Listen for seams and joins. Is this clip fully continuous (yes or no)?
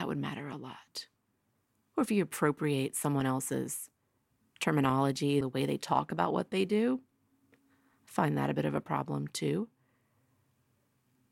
no